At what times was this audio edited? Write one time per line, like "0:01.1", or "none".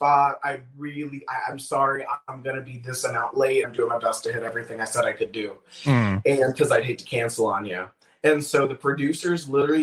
0:03.6

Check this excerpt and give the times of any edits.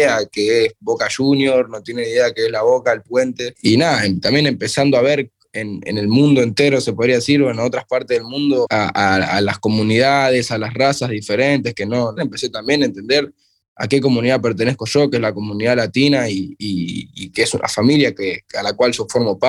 0:12.2

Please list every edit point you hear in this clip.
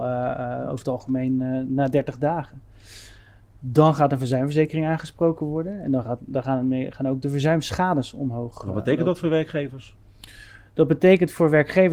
none

